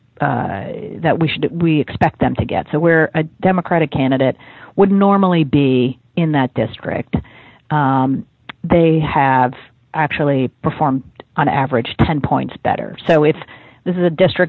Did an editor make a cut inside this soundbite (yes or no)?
no